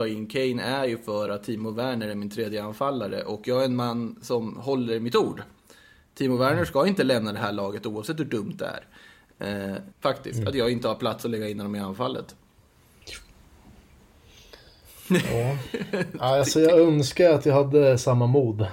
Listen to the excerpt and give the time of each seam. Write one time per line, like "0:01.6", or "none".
0:09.9